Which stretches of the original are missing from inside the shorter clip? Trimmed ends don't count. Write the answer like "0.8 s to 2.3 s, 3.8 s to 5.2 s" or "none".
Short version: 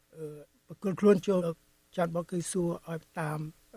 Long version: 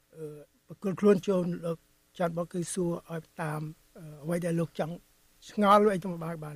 1.4 s to 1.6 s